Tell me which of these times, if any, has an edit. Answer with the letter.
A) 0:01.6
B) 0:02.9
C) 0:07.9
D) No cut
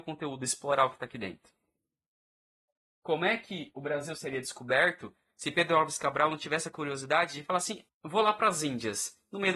C